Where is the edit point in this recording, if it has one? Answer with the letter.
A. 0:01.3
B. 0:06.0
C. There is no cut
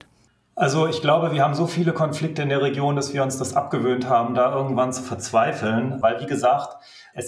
B